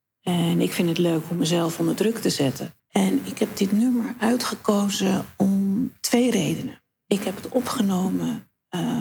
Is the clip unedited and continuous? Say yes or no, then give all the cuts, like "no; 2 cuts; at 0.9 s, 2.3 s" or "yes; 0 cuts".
no; 1 cut; at 2.8 s